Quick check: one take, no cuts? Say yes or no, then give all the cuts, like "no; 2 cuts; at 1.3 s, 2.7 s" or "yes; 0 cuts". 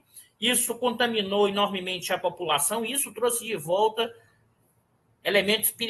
yes; 0 cuts